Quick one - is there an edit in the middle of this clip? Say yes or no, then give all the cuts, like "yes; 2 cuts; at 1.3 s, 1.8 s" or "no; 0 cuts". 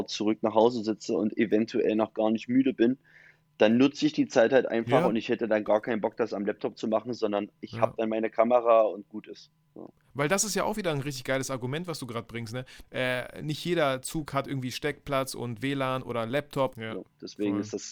yes; 2 cuts; at 12.8 s, 16.7 s